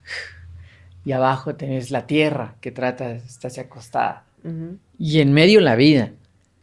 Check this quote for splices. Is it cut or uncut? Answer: uncut